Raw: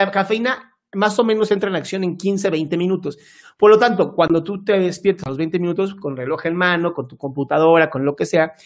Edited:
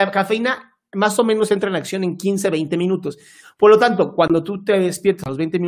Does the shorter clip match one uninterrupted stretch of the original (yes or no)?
yes